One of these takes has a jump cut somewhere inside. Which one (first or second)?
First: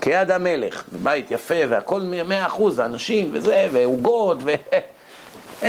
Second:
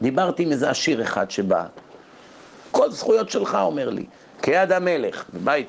second